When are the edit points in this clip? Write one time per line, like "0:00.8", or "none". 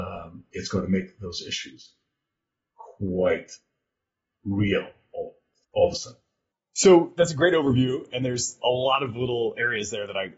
0:05.6